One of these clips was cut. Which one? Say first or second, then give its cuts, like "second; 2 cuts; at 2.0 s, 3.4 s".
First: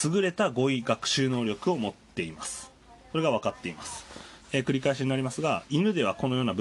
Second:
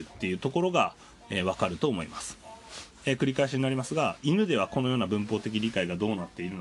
first; 1 cut; at 4.4 s